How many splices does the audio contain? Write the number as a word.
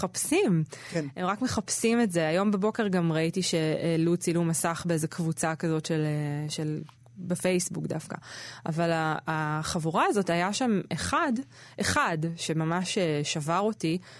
zero